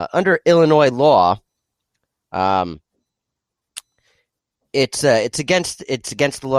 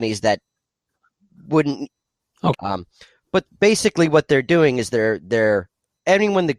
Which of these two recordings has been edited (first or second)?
second